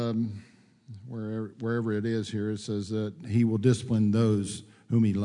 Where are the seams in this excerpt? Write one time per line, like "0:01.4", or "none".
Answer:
none